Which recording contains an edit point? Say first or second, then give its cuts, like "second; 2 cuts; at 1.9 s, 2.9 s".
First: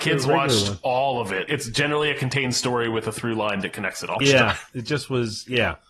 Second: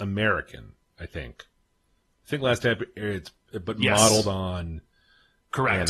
first; 2 cuts; at 1.5 s, 4.2 s